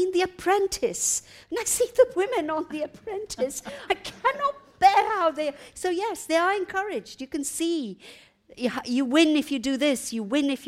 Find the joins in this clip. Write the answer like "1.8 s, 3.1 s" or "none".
3.9 s